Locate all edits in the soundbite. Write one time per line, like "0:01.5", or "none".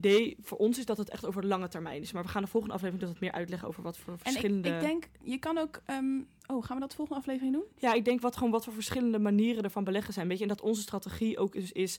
none